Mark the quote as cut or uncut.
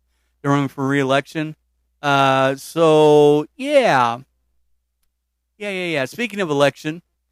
uncut